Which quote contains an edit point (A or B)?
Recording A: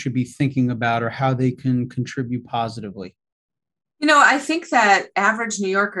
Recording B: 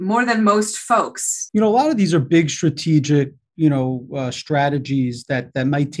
B